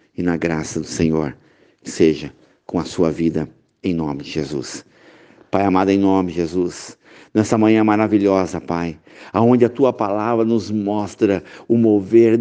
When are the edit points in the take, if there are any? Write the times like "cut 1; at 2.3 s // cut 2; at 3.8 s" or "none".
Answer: cut 1; at 1.9 s